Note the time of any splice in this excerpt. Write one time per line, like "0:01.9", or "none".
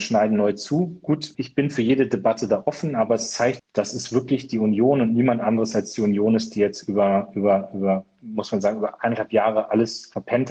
0:01.3
0:03.6